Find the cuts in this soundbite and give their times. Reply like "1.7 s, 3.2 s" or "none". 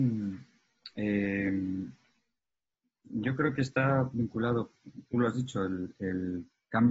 none